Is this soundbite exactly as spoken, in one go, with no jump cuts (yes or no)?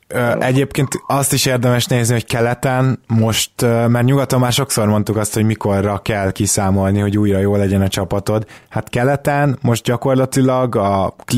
yes